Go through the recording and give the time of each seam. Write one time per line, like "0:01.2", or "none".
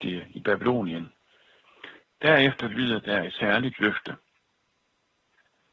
0:02.0